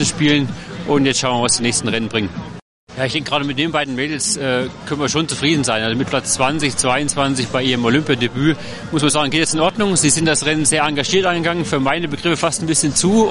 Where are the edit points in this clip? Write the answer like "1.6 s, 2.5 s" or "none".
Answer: 2.9 s